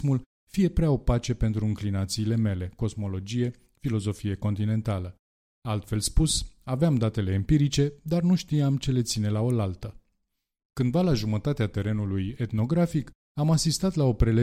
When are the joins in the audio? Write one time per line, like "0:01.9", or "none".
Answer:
none